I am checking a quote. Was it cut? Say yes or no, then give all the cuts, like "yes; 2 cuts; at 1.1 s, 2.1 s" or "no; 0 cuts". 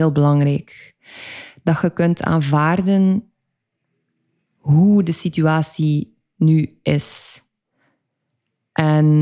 no; 0 cuts